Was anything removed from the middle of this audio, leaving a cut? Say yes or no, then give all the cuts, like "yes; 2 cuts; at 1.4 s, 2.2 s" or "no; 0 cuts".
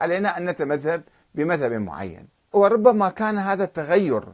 yes; 1 cut; at 2.5 s